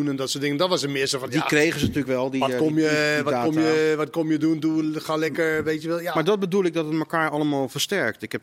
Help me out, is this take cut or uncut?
uncut